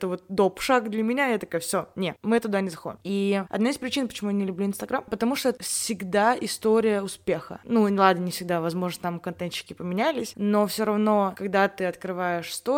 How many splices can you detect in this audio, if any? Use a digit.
0